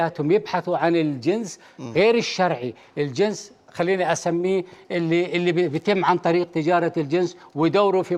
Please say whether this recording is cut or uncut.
uncut